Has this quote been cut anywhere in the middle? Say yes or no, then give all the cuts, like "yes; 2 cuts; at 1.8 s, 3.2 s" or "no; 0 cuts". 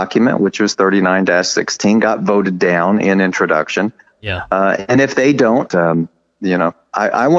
yes; 2 cuts; at 4.1 s, 5.7 s